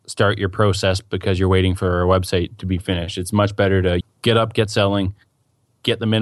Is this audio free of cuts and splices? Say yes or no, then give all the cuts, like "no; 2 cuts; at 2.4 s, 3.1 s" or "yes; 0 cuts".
no; 1 cut; at 4.0 s